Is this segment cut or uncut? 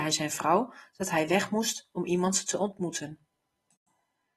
uncut